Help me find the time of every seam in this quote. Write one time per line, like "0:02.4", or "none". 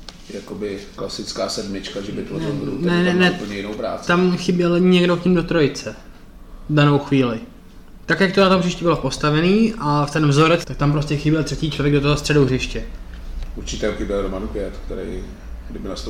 0:10.6